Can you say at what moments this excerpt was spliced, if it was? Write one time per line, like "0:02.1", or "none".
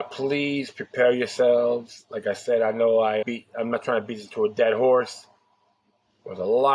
0:03.2